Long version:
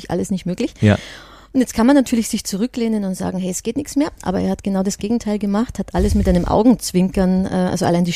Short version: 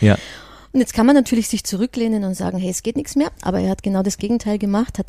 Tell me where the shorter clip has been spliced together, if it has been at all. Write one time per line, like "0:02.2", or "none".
none

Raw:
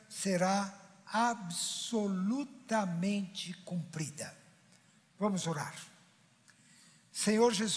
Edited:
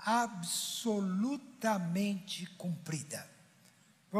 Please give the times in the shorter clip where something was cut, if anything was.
none

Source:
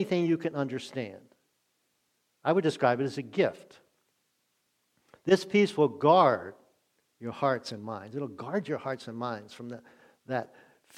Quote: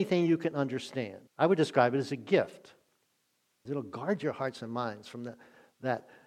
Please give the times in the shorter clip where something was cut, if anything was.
0:01.3
0:03.7

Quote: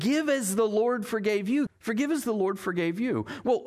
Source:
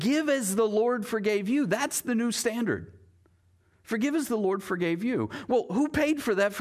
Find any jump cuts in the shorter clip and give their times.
0:01.7

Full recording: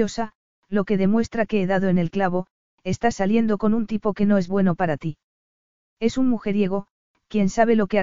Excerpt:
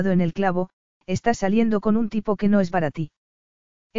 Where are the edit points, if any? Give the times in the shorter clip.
0:02.7

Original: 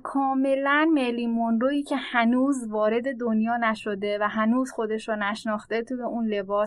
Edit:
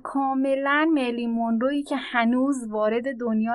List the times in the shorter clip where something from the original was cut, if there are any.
none

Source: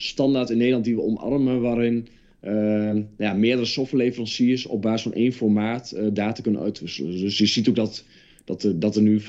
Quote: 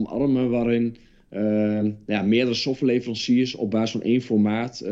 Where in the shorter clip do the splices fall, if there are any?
none

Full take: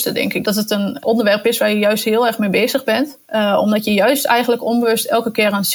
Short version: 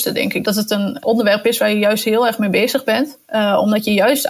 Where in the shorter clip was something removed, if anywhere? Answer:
none

